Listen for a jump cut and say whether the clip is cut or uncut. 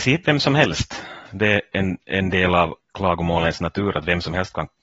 uncut